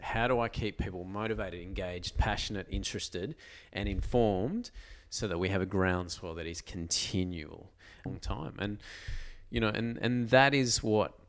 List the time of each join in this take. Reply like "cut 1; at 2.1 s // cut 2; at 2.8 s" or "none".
cut 1; at 8.1 s